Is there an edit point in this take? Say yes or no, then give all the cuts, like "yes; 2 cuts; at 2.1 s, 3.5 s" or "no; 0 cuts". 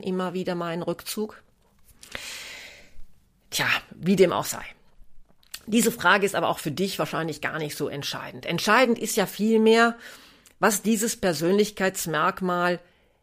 no; 0 cuts